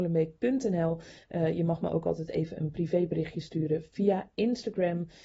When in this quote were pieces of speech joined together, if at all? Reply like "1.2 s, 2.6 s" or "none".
none